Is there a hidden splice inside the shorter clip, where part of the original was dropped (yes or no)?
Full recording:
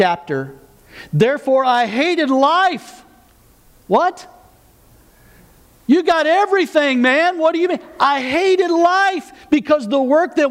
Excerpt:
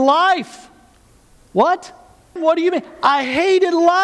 yes